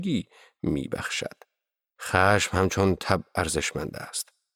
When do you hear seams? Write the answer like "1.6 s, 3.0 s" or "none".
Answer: 1.9 s